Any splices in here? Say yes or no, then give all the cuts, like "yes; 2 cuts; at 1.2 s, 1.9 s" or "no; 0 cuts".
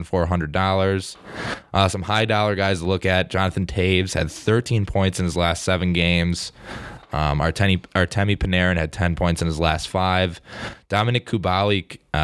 no; 0 cuts